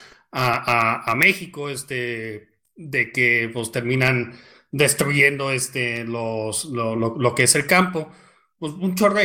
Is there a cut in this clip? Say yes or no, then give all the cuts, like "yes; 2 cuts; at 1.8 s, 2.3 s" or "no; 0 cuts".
yes; 1 cut; at 6.9 s